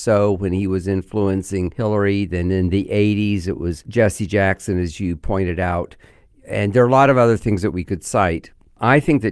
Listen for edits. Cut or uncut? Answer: uncut